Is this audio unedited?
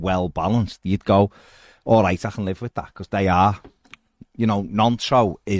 yes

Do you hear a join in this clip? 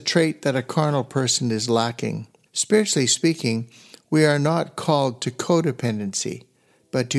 yes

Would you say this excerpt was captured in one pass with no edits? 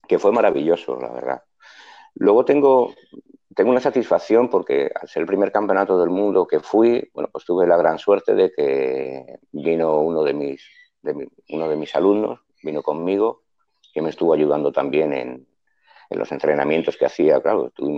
no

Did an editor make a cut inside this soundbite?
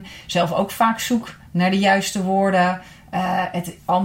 no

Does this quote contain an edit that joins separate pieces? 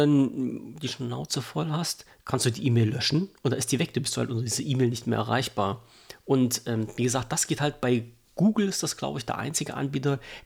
no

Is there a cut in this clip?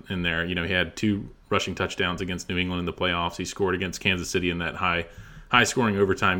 no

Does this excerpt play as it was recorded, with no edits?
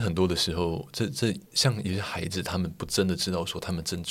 no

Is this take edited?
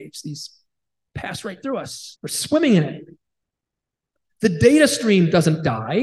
yes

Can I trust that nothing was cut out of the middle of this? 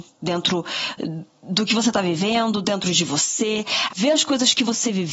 no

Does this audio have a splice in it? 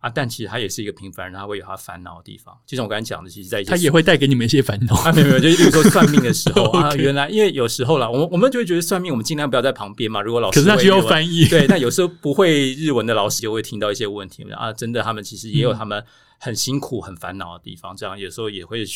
yes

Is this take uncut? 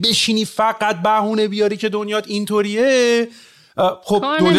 yes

